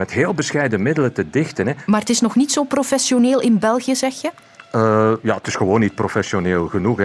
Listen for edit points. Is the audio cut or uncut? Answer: uncut